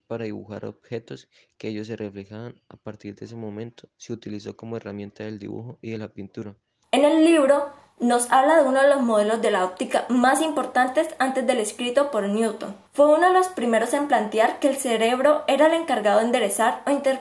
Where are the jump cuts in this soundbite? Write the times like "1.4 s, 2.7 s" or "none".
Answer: 6.8 s, 12.9 s